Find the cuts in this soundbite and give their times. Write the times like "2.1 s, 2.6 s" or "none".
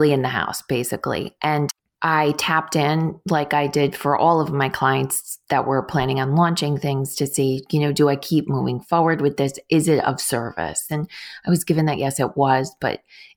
10.9 s